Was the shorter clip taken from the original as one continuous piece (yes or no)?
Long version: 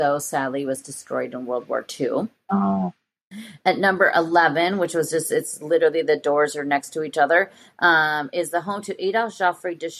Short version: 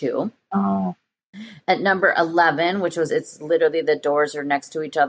no